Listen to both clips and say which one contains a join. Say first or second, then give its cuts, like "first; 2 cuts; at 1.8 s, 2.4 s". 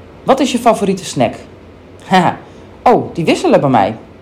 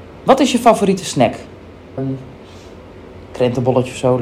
second; 1 cut; at 2.0 s